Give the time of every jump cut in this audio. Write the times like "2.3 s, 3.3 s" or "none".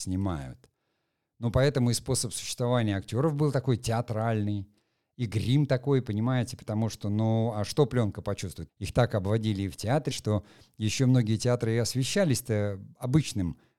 8.7 s, 10.1 s